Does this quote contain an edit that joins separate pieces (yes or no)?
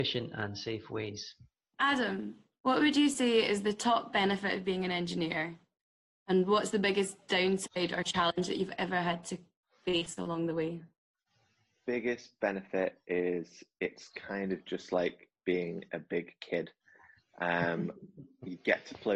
no